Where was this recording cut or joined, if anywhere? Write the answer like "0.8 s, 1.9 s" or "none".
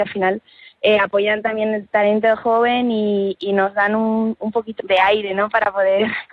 4.8 s